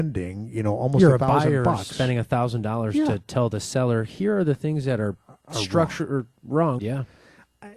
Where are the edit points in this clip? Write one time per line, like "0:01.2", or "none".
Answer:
0:06.8